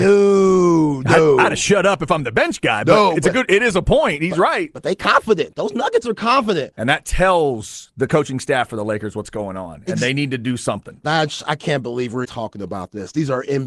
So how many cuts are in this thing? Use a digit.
2